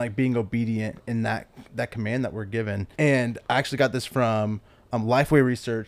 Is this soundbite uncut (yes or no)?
no